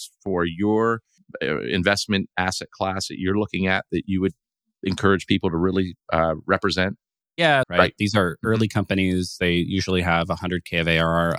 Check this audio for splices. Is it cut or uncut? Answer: cut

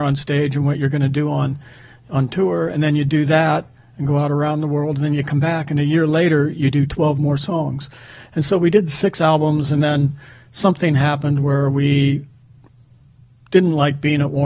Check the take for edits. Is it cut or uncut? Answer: uncut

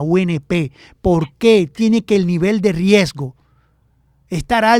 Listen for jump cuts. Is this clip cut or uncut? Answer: uncut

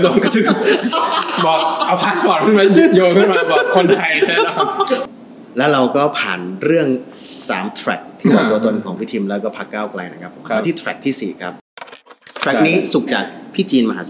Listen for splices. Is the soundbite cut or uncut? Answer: cut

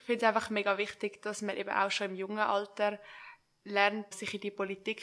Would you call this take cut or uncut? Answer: cut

